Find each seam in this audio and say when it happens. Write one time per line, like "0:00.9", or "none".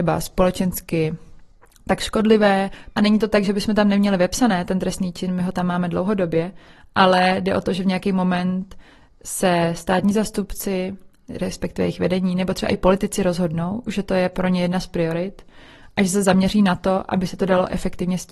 0:02.9